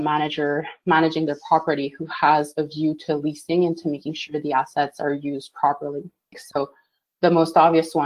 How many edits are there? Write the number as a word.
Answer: one